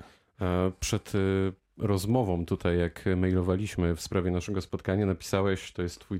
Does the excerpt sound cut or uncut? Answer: uncut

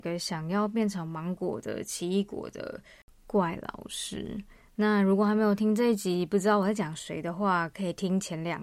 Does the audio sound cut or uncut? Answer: uncut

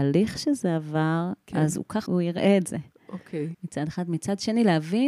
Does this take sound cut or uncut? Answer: cut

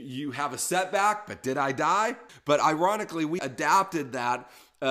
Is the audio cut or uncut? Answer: cut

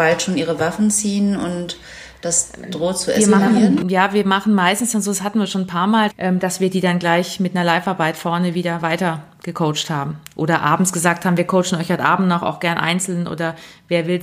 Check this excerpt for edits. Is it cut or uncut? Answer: cut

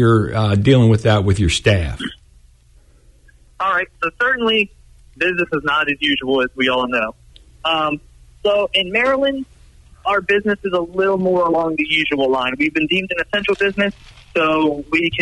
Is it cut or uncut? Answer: uncut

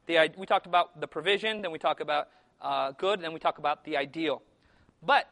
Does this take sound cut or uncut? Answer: uncut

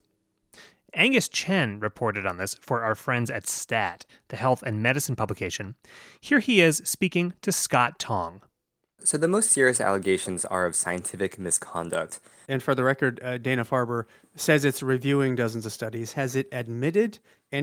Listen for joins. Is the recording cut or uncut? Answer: cut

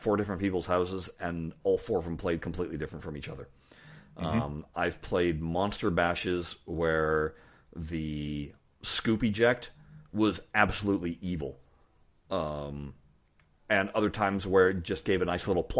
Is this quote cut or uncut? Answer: uncut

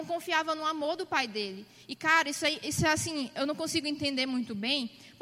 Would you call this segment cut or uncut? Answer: uncut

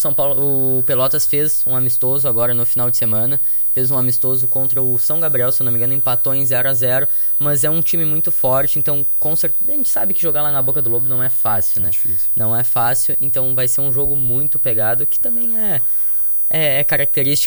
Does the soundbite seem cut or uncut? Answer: uncut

